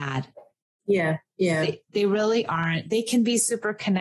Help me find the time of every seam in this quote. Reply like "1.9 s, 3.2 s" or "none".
none